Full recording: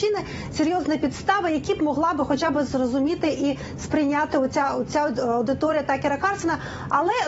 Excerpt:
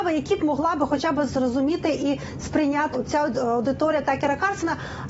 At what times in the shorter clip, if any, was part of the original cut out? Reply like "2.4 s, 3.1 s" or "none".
2.9 s